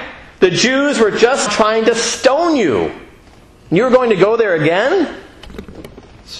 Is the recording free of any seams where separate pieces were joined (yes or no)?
no